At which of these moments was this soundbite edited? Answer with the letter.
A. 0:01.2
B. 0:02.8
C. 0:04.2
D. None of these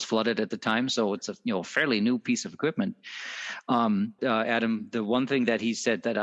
C